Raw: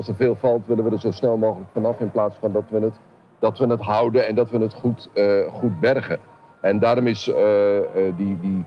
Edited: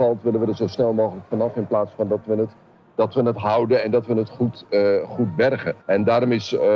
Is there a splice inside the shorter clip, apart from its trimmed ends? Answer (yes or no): yes